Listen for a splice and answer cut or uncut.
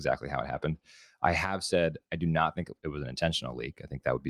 uncut